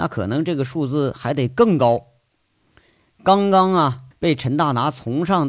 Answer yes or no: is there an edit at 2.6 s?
no